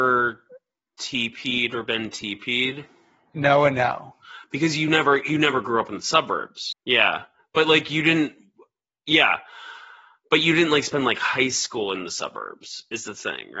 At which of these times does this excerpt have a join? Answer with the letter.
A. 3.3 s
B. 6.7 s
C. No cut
B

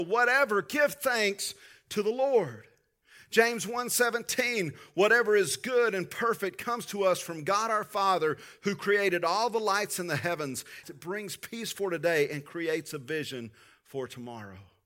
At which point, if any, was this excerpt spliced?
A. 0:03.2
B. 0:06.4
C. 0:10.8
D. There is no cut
C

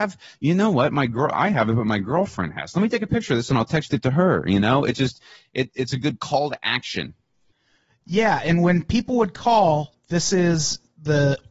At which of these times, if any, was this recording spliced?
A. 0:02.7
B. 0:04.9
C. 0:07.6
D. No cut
D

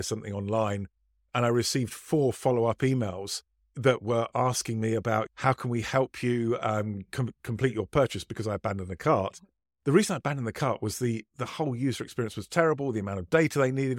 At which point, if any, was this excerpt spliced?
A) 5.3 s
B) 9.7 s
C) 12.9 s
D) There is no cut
A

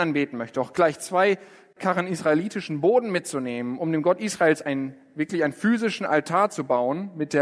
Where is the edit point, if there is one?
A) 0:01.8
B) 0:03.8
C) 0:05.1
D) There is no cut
D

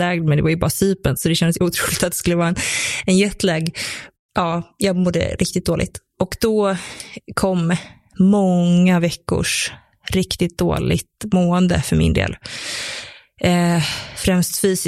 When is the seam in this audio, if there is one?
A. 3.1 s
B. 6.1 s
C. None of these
C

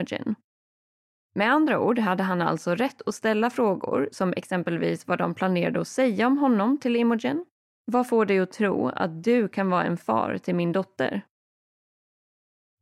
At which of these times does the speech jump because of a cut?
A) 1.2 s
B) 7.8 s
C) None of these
B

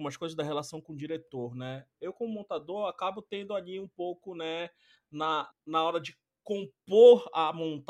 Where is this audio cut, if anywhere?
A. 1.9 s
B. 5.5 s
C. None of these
B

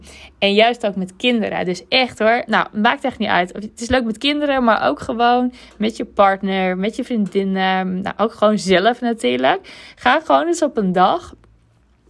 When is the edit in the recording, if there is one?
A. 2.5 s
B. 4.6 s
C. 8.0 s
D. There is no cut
A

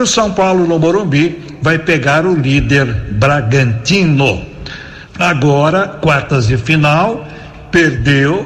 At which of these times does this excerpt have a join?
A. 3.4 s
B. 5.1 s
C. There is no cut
B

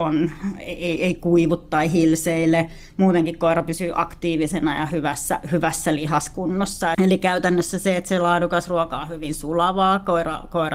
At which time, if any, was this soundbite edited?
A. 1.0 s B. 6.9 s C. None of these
B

